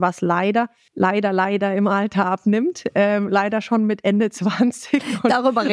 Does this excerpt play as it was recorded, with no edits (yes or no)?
yes